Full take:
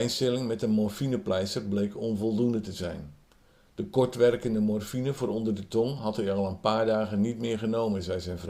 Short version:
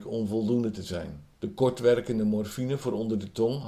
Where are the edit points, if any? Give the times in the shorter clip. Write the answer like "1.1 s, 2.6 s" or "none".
1.3 s